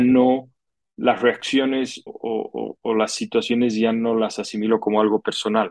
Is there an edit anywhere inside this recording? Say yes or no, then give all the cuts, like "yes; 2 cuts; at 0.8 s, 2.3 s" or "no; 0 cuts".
yes; 1 cut; at 2.1 s